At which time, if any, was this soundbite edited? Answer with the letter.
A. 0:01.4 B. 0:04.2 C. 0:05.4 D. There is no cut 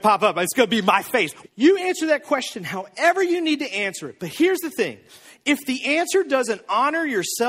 A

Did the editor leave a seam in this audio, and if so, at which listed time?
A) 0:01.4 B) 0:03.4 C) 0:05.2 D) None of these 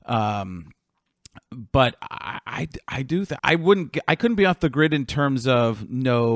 B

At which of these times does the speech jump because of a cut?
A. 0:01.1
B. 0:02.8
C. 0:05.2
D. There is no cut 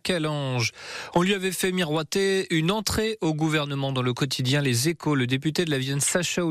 D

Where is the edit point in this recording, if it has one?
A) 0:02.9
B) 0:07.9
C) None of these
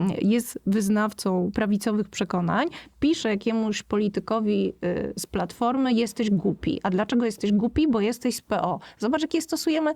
C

